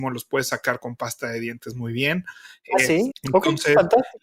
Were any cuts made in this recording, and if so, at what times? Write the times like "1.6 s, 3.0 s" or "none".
3.1 s